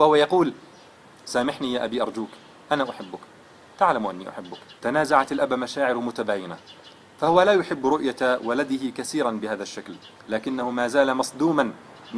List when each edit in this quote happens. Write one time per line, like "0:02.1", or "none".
0:04.8
0:10.2

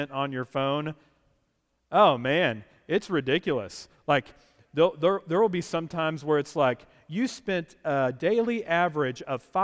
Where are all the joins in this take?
none

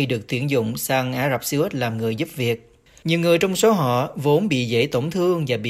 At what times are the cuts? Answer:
0:03.0

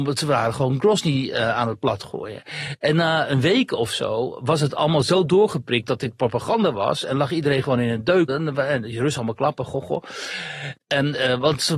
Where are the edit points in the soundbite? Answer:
0:08.3
0:10.8

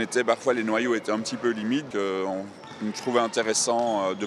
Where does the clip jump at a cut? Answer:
0:01.9

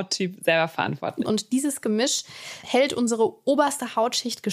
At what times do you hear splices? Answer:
0:01.2
0:02.6

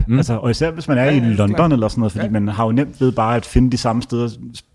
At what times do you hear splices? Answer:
none

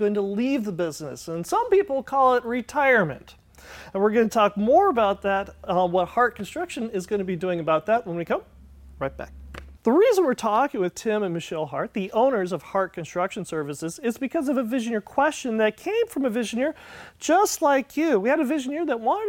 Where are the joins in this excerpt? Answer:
0:09.8

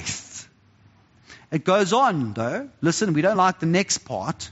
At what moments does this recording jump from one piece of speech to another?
none

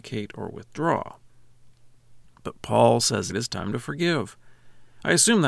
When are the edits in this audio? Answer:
0:03.3

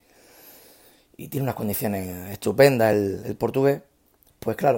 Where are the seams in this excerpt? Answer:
none

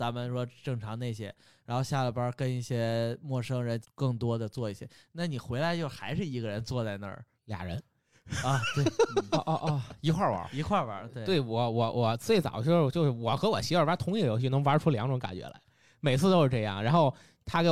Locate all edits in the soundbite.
0:03.8
0:07.4

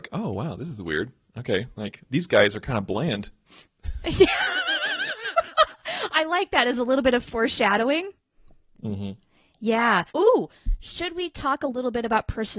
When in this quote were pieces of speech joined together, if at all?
0:10.1

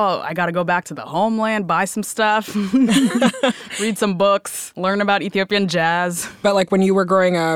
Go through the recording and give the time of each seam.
none

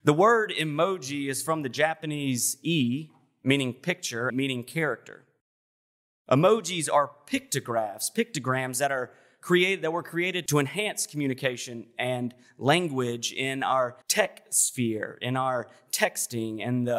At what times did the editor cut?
0:04.3
0:14.0

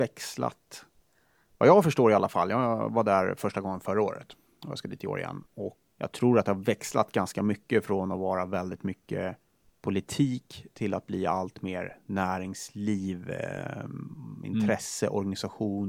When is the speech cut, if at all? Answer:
0:05.9

